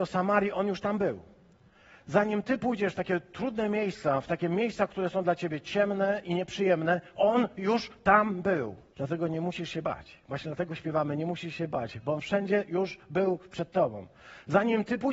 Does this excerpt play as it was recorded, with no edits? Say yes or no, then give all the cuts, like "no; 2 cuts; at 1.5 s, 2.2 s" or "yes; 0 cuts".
no; 1 cut; at 8.9 s